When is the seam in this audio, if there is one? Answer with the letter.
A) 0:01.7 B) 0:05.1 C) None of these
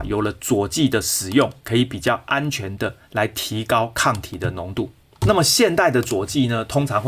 C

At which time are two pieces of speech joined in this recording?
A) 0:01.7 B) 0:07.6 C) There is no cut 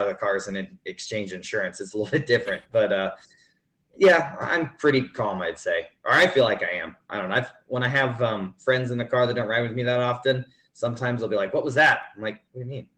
C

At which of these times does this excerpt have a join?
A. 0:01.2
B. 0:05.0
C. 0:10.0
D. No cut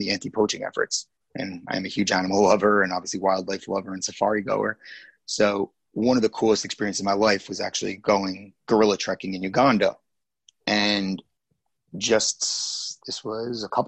A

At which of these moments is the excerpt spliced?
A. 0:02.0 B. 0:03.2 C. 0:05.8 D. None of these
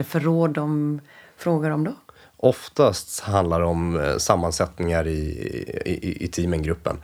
D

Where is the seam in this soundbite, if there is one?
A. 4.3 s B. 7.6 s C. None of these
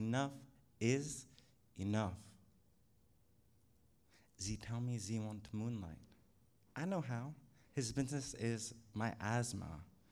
B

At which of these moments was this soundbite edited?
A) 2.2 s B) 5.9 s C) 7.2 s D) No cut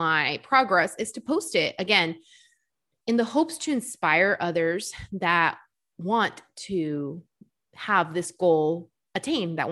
D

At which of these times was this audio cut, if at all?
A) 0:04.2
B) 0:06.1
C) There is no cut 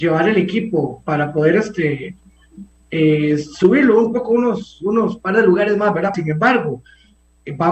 B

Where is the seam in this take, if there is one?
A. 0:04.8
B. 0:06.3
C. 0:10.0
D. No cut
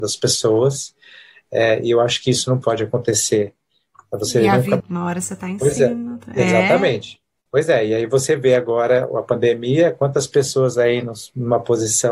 A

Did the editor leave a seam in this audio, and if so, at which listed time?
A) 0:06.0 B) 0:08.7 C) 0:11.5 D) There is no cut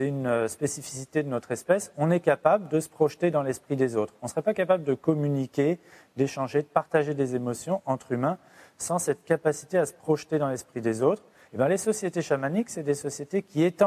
C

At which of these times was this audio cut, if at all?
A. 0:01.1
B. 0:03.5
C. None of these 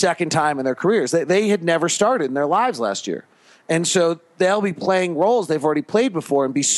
C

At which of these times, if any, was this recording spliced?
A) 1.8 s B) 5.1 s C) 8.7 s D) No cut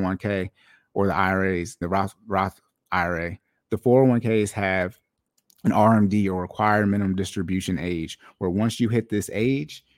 A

